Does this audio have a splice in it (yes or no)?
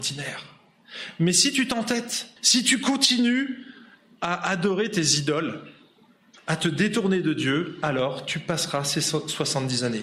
yes